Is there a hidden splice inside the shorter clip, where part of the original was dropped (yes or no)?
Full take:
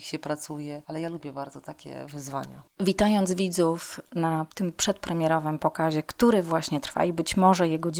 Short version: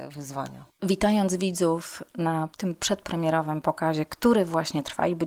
no